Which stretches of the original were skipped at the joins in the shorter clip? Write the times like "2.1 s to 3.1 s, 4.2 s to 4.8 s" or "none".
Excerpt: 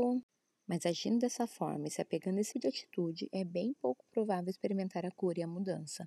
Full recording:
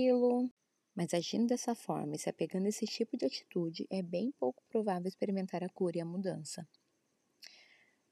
2.8 s to 3.1 s